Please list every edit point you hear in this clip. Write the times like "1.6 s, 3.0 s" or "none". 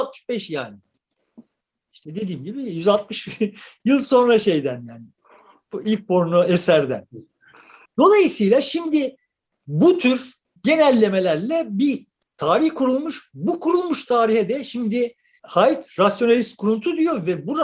none